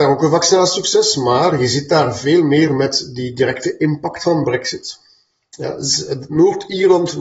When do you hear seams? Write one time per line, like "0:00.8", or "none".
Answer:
none